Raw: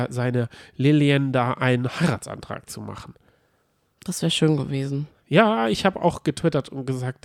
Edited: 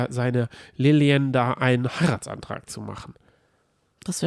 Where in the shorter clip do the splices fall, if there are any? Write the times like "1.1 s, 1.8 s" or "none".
none